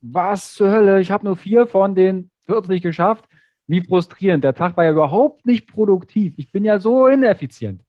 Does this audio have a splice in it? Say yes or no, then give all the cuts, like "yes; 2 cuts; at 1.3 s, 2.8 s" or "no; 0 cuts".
no; 0 cuts